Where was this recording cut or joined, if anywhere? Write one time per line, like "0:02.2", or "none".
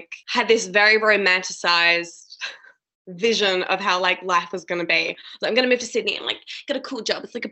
none